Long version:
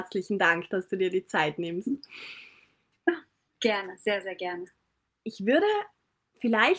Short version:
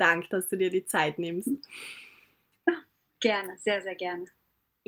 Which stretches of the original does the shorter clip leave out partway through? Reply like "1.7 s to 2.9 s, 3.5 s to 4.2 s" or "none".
none